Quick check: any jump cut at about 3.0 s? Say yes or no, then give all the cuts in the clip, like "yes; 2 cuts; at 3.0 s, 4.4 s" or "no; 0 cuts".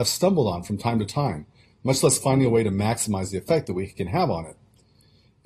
no; 1 cut; at 1.7 s